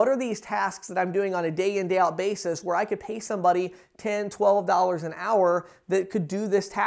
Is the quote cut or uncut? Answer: uncut